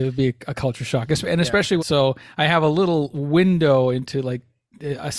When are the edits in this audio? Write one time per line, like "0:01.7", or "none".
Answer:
0:01.8